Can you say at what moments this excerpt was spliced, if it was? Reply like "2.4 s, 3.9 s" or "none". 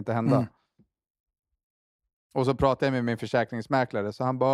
none